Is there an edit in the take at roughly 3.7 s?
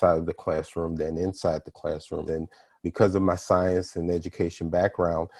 no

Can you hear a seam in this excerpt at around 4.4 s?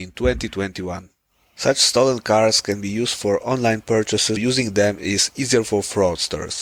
yes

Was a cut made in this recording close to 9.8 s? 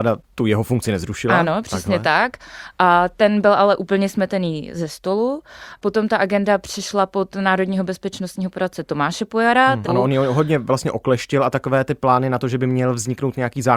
yes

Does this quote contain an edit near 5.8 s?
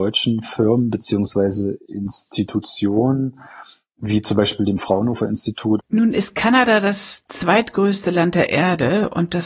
yes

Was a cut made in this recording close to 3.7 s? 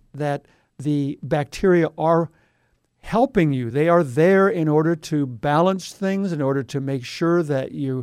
no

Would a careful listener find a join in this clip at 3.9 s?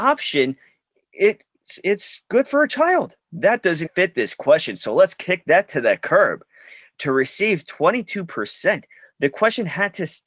yes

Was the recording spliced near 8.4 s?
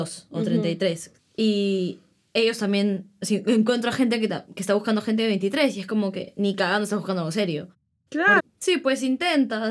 yes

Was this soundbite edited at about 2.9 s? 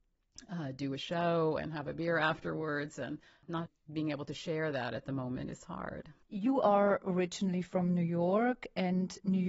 no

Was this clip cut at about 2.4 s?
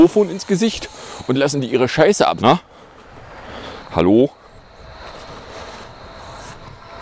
yes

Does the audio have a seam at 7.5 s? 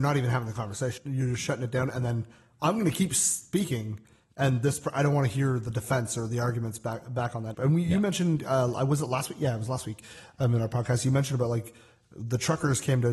yes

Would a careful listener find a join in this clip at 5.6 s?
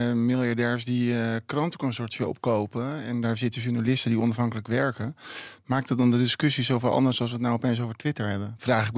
no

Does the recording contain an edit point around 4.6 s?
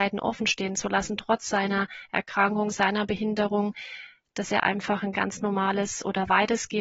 no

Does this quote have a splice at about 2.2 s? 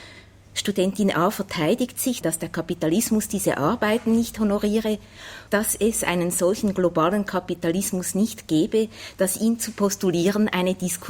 yes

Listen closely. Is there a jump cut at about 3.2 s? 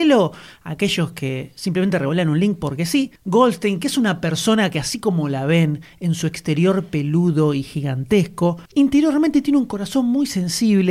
yes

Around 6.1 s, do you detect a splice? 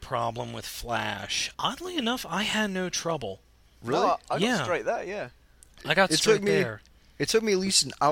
no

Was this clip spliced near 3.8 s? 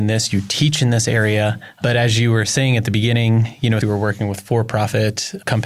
yes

